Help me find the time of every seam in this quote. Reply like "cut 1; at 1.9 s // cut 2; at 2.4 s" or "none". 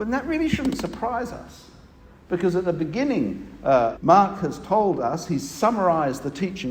cut 1; at 4.0 s